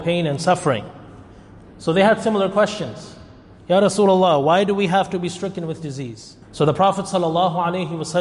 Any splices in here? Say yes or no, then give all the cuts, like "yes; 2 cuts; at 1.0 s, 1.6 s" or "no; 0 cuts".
yes; 1 cut; at 6.4 s